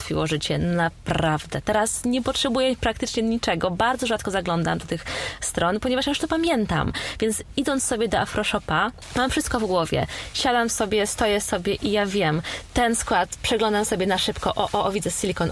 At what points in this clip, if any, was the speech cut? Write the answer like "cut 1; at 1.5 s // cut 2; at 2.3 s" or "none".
none

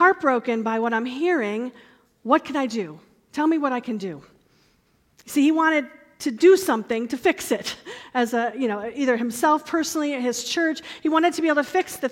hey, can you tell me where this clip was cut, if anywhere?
none

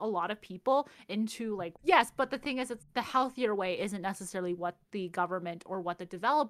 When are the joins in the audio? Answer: cut 1; at 1.7 s // cut 2; at 2.8 s

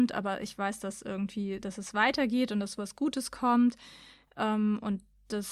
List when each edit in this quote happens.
none

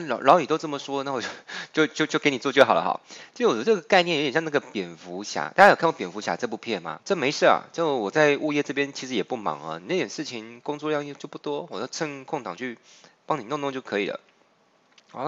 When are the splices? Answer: cut 1; at 7.0 s

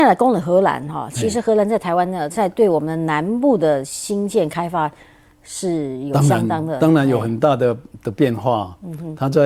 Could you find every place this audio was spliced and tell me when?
cut 1; at 2.3 s

